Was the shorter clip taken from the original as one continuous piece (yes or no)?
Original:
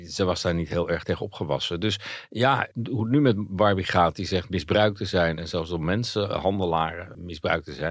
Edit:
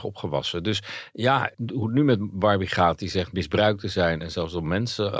yes